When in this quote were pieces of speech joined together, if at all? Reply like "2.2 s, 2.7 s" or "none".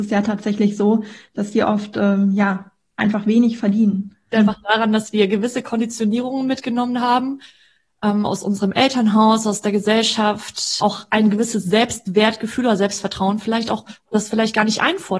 4.3 s, 10.8 s